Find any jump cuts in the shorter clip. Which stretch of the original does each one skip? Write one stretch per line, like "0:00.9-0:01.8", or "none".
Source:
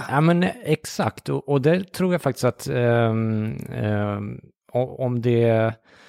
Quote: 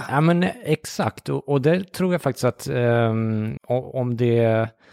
0:03.6-0:04.6